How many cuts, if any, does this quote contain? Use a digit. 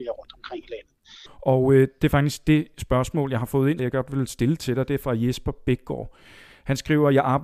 2